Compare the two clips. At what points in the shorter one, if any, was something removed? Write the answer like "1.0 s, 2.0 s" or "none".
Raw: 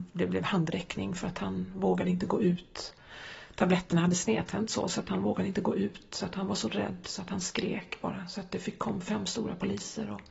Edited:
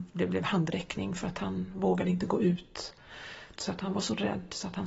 3.6 s